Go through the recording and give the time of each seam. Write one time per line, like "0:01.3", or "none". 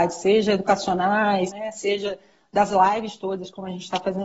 0:01.5